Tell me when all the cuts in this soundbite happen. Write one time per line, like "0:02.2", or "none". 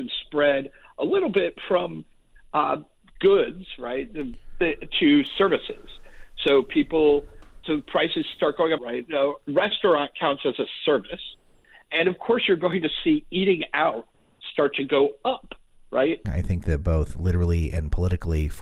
0:08.8
0:16.2